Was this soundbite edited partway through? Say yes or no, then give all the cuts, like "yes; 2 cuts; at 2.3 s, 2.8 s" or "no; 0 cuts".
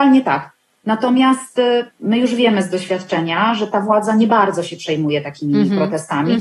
yes; 1 cut; at 1.9 s